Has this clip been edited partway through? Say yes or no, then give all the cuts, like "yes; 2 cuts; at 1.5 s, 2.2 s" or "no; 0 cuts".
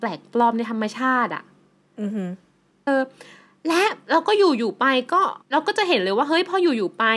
yes; 2 cuts; at 2.9 s, 5.4 s